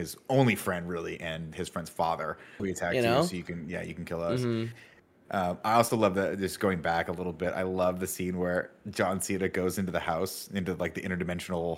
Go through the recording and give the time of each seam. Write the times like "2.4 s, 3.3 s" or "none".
2.6 s